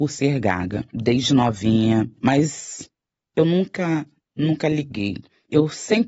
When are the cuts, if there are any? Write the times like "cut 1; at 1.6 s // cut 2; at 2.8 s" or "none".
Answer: none